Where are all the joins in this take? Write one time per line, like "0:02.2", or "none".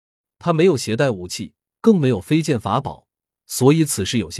0:01.7